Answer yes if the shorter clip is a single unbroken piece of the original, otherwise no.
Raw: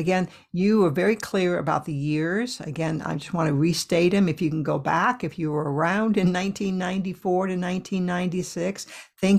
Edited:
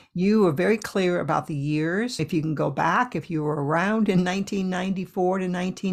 no